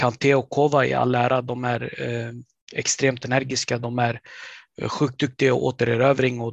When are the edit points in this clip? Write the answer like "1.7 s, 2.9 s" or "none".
none